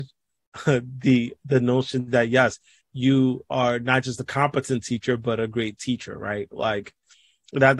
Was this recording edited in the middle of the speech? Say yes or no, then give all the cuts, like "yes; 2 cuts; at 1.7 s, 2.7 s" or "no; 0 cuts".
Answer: no; 0 cuts